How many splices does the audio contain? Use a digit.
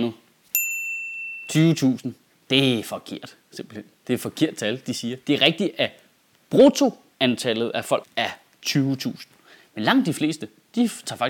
2